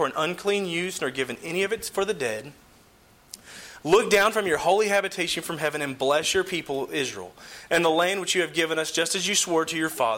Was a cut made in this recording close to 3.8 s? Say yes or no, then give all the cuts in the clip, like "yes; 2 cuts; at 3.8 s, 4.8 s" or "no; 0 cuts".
yes; 1 cut; at 3.8 s